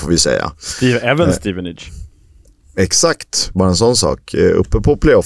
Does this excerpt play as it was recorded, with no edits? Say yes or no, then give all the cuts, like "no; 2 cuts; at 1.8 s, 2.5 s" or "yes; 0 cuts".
yes; 0 cuts